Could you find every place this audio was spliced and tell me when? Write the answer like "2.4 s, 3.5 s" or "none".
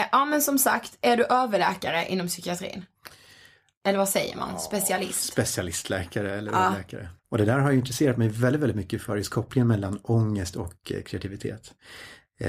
7.2 s